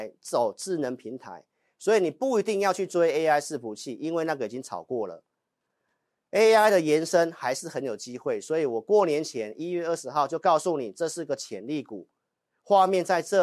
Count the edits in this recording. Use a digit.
0